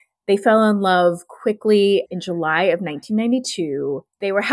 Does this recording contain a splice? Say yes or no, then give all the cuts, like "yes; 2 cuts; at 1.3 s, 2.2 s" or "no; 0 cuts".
yes; 1 cut; at 2.1 s